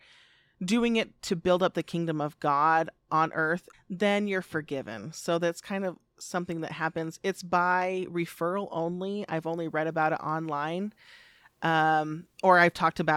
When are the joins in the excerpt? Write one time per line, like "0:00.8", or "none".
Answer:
0:03.7